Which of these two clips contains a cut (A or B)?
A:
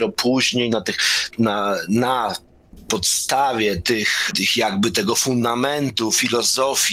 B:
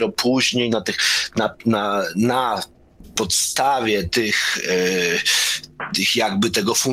A